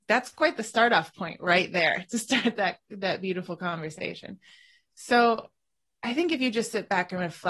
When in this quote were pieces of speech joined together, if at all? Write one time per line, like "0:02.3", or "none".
none